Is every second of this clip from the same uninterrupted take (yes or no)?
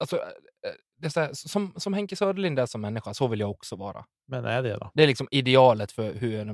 yes